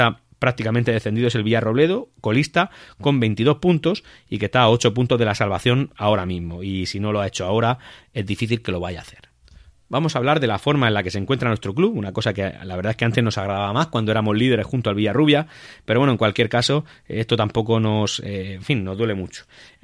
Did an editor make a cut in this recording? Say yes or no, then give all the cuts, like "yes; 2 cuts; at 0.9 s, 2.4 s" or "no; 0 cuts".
no; 0 cuts